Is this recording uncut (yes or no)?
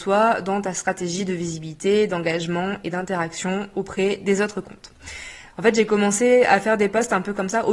no